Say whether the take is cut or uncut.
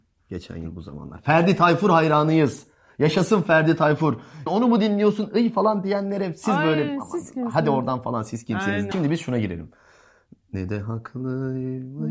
cut